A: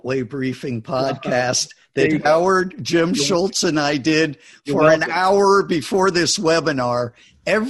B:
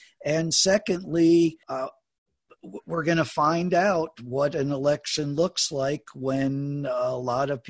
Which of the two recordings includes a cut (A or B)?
B